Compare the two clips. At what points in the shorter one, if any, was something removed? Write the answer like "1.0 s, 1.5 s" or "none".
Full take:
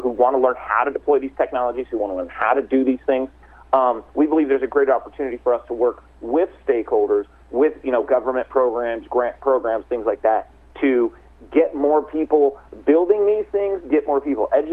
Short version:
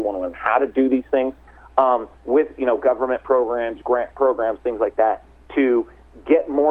2.1 s